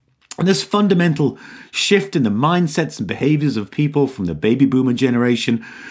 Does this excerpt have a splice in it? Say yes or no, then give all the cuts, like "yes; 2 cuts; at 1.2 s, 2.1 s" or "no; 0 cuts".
no; 0 cuts